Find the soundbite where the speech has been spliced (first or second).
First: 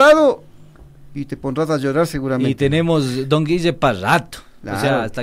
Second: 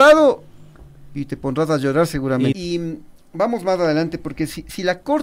second